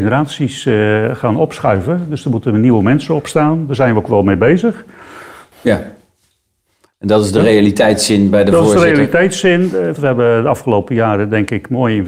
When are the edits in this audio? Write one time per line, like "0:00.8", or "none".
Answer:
0:05.5
0:10.0

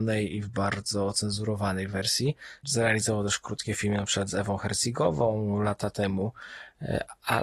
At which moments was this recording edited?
0:02.6

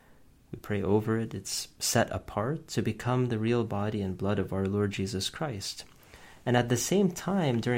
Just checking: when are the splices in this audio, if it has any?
none

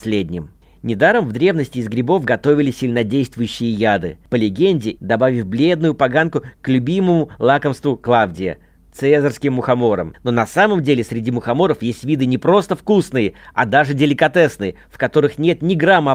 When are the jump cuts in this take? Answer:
0:05.0
0:10.1

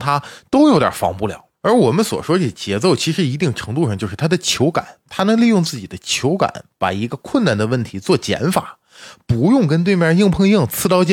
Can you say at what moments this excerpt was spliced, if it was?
none

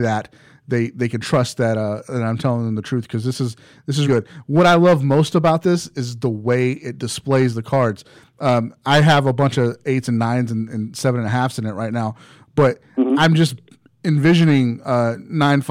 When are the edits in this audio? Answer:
0:04.1

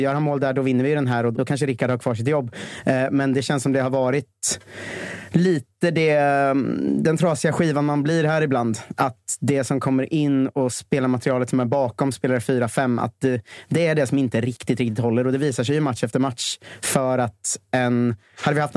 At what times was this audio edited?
0:01.3

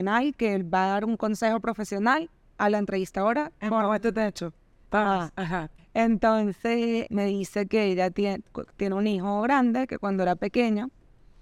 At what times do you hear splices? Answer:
0:05.8
0:07.1

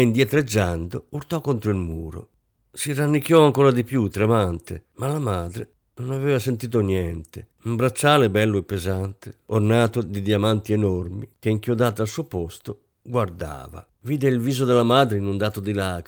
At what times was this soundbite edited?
0:07.5
0:11.3
0:13.9

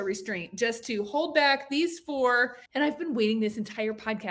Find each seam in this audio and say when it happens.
0:02.7

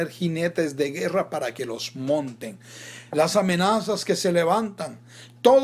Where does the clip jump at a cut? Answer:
0:03.1

